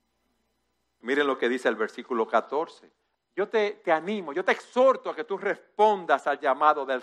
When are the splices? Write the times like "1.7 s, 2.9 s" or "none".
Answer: 1.0 s, 3.1 s